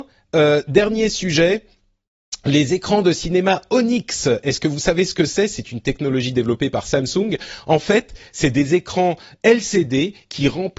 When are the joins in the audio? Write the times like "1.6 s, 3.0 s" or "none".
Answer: none